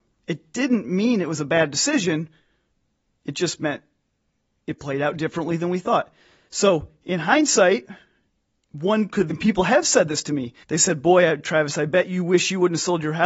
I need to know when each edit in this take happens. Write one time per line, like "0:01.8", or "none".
0:09.3
0:10.6

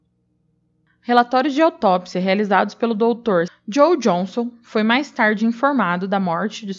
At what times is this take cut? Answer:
0:03.5

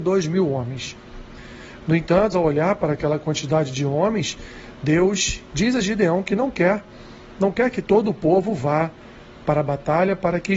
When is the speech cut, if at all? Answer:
0:02.3

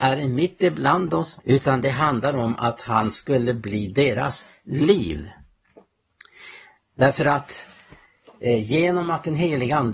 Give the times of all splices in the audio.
0:01.4

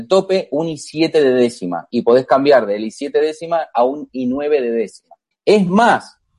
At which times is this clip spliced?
0:05.3

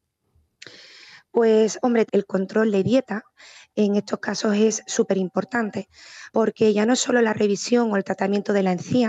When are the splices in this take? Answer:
0:02.1

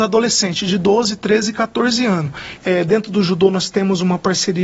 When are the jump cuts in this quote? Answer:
0:02.6

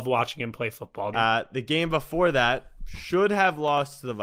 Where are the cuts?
0:01.1

